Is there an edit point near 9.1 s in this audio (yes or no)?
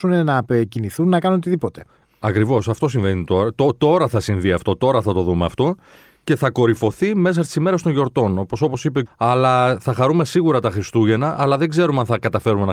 yes